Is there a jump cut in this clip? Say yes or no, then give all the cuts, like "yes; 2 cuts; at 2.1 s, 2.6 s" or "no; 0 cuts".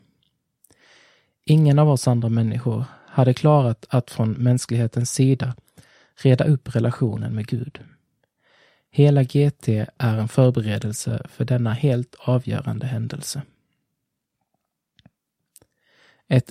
no; 0 cuts